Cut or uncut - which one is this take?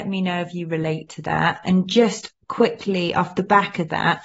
uncut